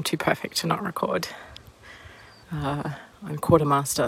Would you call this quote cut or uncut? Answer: cut